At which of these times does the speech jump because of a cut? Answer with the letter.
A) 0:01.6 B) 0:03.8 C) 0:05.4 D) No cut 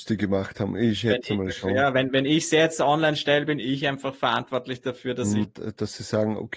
C